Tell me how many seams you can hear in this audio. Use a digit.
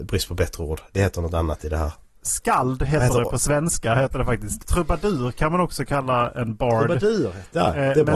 1